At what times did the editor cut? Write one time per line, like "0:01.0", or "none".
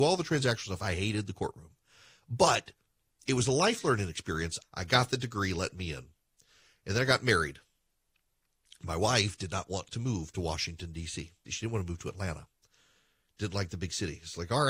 0:04.6
0:11.5